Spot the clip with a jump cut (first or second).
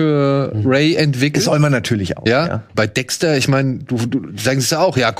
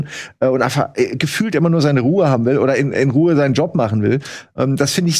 first